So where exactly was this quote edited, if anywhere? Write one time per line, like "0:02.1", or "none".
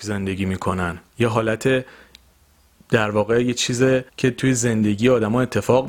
0:01.1
0:04.1